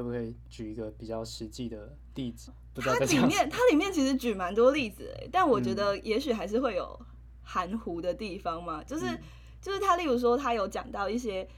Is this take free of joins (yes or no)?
no